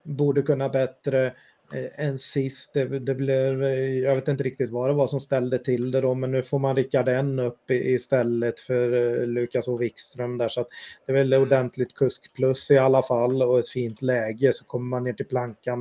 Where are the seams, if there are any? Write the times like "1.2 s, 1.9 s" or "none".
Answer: none